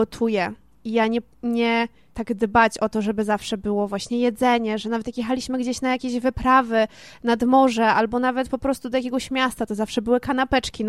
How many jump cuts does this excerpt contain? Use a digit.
1